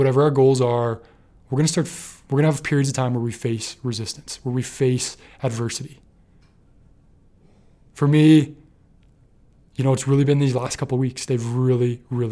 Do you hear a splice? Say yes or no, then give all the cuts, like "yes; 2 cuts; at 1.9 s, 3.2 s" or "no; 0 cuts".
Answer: no; 0 cuts